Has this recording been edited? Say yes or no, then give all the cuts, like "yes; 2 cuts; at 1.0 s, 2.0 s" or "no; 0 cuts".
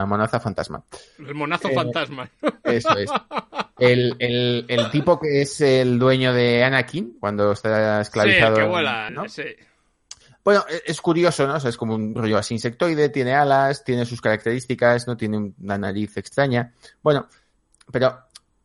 yes; 1 cut; at 9.1 s